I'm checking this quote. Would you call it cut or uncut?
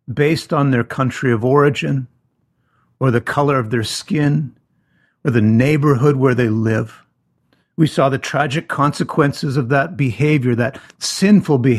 uncut